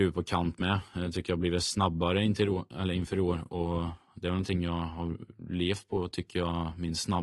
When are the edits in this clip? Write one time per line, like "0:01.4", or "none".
none